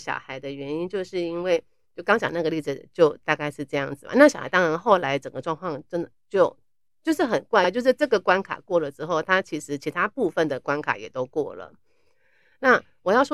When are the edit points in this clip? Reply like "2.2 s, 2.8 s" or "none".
none